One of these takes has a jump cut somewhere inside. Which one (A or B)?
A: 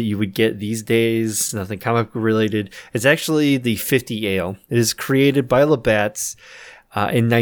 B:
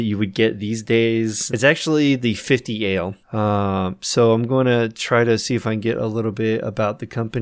B